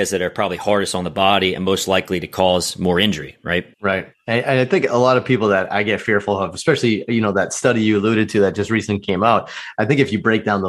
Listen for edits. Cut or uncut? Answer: cut